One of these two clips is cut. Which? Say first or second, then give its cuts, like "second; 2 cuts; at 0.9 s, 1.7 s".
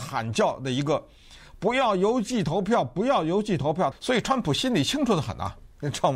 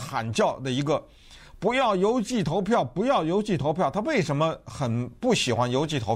first; 1 cut; at 3.9 s